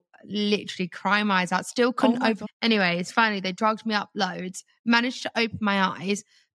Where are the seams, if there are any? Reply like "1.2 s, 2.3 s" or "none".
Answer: 2.4 s